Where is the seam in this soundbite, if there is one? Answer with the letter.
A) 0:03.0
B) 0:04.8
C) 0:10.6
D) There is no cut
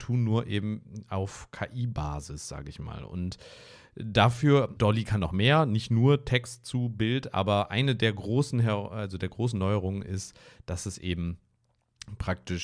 B